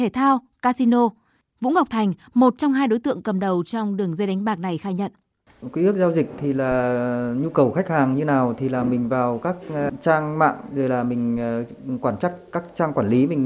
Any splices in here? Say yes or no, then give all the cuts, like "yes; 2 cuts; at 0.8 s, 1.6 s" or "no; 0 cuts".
yes; 1 cut; at 1.4 s